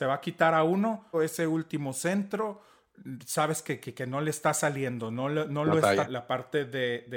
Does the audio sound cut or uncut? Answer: cut